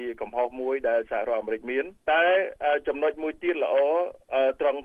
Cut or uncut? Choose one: cut